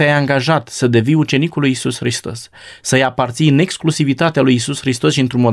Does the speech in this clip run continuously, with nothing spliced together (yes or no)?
yes